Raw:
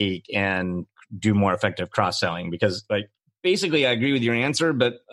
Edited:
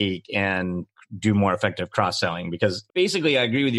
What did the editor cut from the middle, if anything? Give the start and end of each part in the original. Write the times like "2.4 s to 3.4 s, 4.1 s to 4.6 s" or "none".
2.9 s to 3.3 s